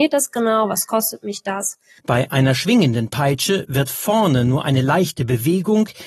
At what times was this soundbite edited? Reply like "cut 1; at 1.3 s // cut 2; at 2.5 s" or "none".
cut 1; at 2.0 s